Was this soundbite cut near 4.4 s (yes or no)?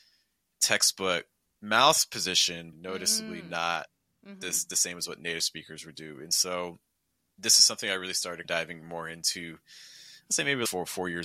no